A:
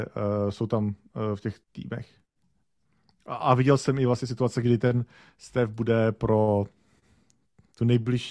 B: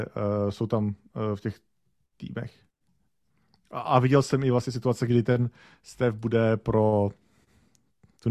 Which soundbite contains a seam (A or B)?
A